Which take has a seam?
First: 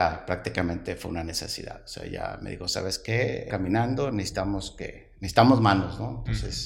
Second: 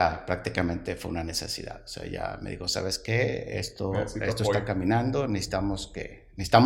first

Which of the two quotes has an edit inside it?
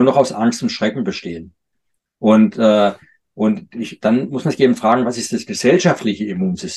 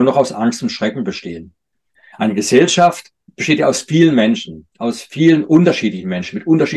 second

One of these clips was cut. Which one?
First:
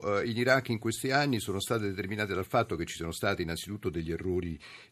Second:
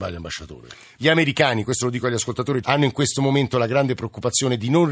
second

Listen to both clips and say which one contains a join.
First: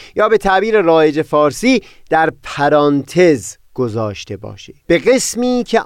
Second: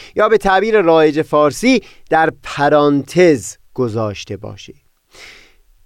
first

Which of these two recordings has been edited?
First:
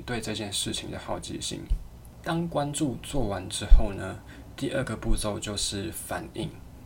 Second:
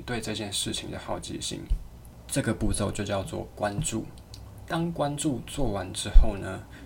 first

